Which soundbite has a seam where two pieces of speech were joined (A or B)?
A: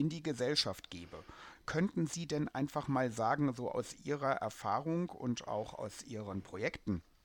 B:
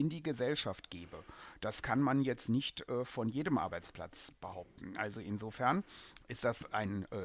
A